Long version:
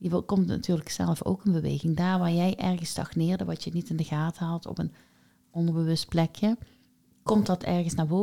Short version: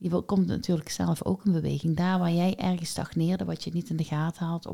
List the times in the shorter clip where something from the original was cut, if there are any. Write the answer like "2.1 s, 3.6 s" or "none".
none